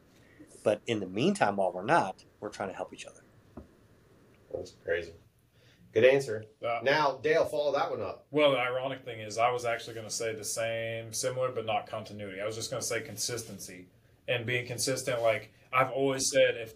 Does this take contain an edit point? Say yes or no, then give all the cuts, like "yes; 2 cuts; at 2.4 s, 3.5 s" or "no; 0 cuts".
no; 0 cuts